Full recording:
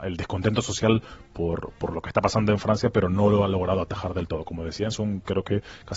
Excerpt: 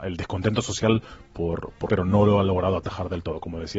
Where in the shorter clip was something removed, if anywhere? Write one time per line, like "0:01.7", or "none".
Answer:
0:01.9